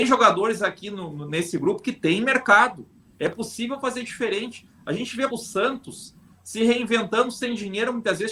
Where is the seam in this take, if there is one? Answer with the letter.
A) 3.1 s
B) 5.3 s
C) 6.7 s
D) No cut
B